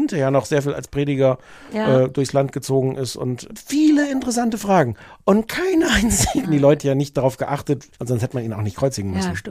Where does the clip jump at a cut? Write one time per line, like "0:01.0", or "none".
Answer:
0:03.5
0:06.4
0:07.9